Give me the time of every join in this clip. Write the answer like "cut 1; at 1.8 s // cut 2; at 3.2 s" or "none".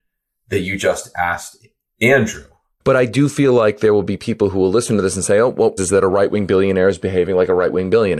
cut 1; at 2.8 s // cut 2; at 5.8 s